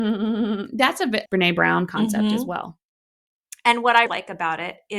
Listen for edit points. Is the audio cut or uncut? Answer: cut